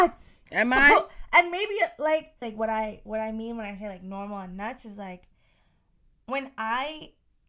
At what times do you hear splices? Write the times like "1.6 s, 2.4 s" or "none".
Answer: 2.4 s